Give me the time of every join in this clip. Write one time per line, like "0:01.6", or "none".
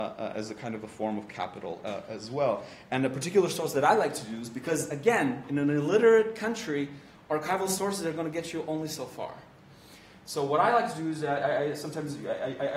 none